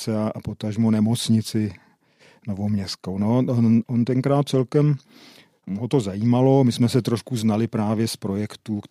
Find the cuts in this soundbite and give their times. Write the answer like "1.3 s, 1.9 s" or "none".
none